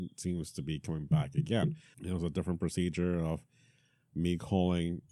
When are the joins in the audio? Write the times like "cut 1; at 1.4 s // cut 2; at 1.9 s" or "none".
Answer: cut 1; at 1.9 s